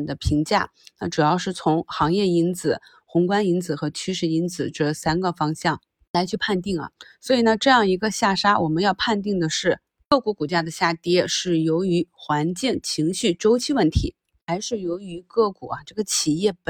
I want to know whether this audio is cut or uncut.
uncut